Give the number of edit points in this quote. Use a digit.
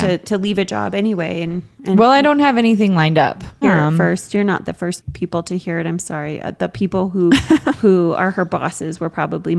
1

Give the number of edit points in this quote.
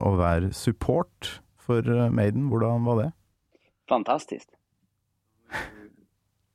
0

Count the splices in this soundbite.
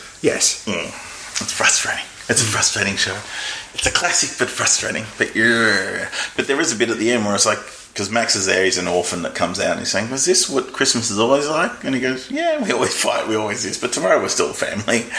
0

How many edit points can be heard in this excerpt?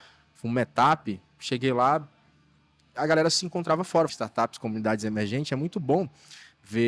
1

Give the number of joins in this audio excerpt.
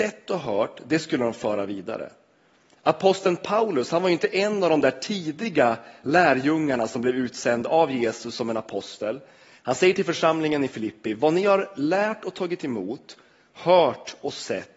1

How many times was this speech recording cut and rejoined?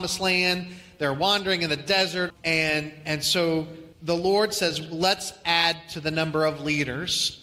2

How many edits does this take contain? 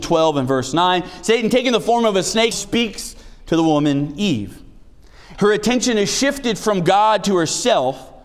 2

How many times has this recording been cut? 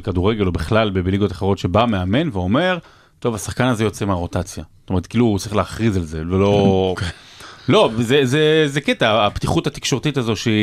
0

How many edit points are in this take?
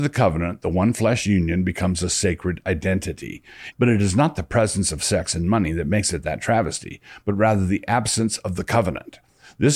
1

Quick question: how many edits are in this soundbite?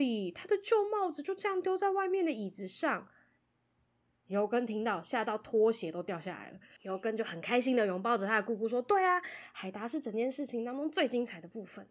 1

